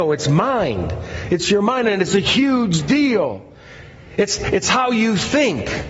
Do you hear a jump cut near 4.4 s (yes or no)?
yes